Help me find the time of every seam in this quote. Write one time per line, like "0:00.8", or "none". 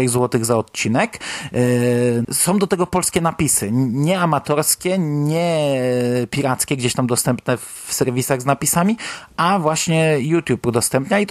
0:02.2